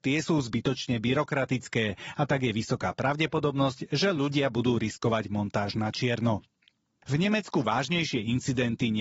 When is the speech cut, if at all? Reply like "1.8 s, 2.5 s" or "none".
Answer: none